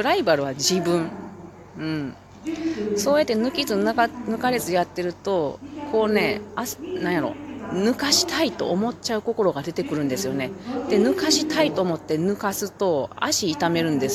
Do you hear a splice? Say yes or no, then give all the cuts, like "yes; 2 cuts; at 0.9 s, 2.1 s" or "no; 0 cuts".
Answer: no; 0 cuts